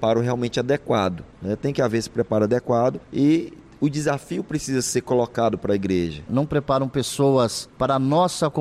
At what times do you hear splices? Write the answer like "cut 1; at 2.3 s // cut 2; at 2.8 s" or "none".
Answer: cut 1; at 6.3 s